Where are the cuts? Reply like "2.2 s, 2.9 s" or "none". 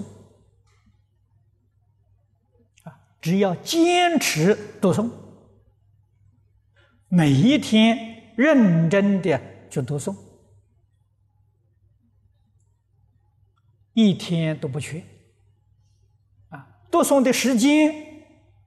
none